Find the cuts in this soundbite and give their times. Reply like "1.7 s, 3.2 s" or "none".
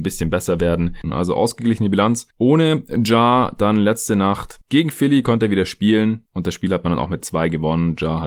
1.0 s